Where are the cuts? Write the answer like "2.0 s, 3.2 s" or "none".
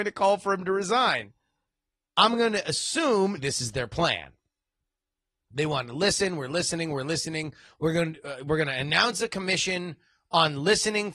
3.4 s